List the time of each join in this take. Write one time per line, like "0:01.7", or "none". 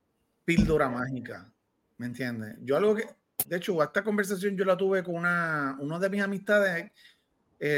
none